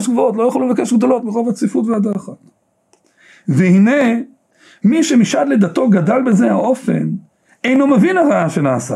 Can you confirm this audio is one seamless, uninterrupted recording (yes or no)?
yes